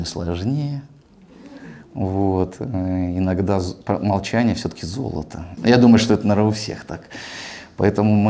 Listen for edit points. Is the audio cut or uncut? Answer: cut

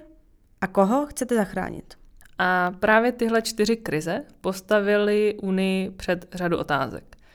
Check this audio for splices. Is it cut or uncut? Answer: cut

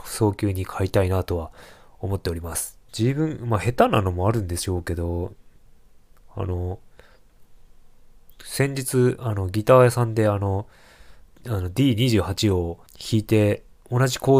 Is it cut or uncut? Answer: cut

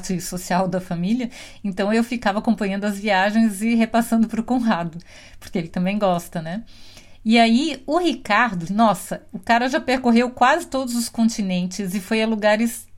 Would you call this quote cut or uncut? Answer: cut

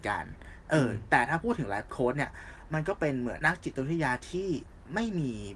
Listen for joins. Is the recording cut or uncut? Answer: cut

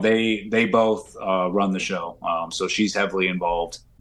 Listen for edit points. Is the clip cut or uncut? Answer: uncut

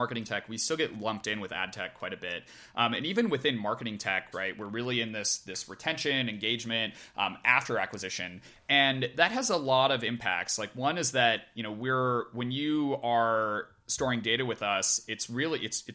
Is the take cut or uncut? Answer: cut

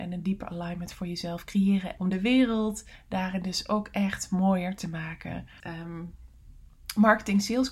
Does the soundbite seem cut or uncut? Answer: cut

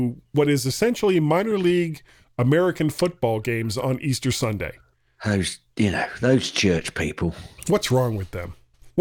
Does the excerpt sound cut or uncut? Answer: uncut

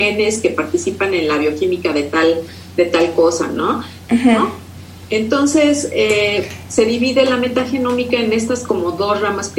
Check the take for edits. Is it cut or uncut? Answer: cut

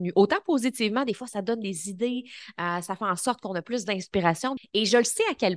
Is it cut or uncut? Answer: cut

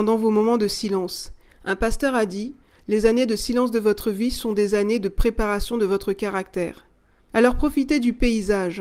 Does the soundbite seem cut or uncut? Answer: cut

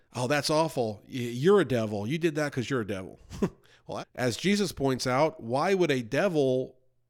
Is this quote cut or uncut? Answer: cut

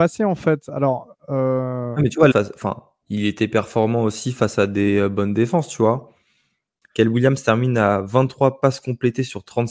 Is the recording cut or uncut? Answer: cut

